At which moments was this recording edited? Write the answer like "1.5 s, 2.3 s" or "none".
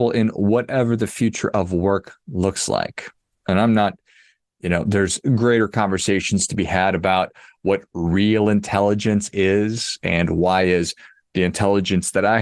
none

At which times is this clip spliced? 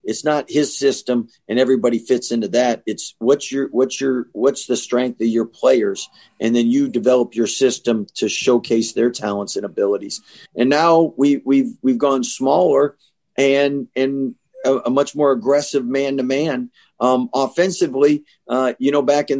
10.5 s

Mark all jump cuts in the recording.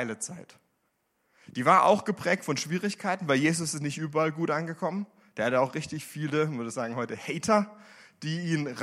none

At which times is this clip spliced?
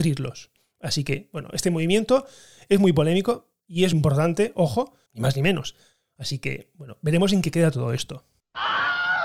3.9 s, 5.1 s

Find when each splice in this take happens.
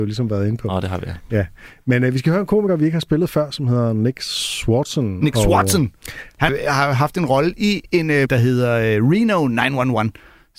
6.5 s, 8.3 s

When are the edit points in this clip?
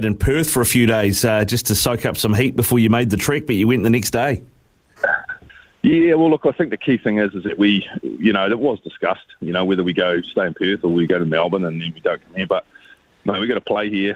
none

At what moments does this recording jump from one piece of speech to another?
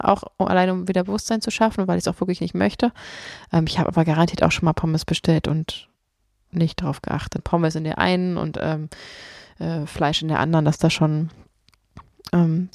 7.4 s

